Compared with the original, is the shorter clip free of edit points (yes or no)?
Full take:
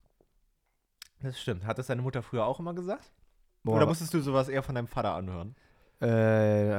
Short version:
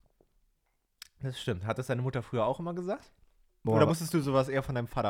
yes